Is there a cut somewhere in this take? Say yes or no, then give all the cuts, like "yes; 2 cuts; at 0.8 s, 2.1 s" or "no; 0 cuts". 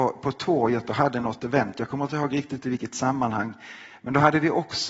no; 0 cuts